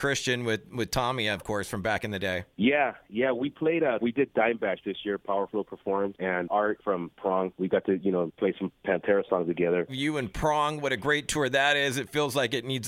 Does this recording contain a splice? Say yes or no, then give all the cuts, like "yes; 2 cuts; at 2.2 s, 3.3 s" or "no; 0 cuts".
yes; 3 cuts; at 4.0 s, 8.8 s, 9.9 s